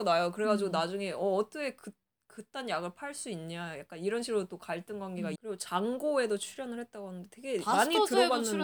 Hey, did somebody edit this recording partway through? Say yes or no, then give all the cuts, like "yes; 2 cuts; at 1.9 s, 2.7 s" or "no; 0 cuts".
yes; 1 cut; at 5.4 s